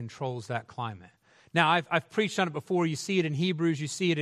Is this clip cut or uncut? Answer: uncut